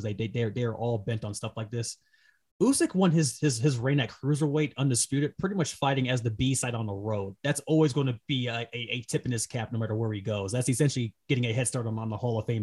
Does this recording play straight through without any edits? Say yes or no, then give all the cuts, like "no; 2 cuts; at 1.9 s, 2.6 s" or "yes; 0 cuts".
yes; 0 cuts